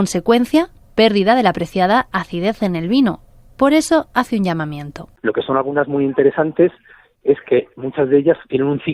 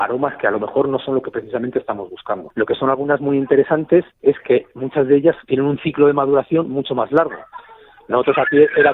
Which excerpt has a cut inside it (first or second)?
second